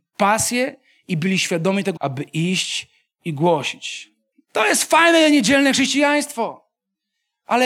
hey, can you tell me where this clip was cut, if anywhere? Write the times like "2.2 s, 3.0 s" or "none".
2.0 s, 4.3 s